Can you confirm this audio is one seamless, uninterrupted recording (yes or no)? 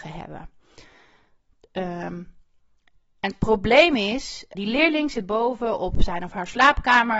no